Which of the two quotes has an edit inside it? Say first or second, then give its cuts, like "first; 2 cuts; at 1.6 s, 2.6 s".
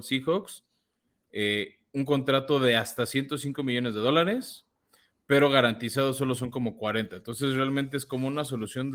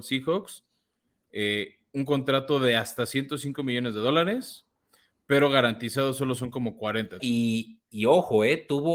second; 1 cut; at 7.2 s